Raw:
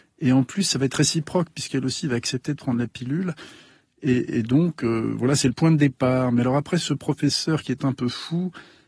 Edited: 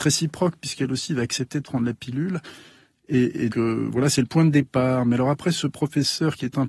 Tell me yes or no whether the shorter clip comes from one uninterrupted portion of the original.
no